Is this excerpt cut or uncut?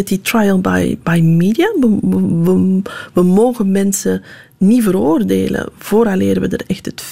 uncut